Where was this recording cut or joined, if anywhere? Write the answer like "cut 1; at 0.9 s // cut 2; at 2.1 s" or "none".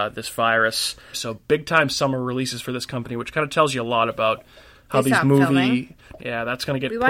cut 1; at 1.1 s // cut 2; at 6.2 s